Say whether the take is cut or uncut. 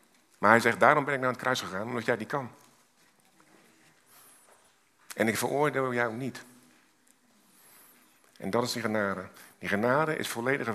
uncut